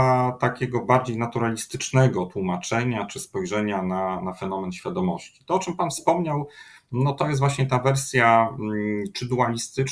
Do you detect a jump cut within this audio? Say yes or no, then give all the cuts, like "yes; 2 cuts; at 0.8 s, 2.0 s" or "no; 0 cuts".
no; 0 cuts